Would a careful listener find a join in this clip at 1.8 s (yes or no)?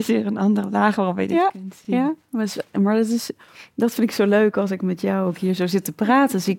no